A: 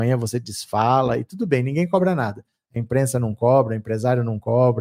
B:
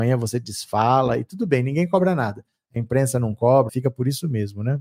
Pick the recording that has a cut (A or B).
B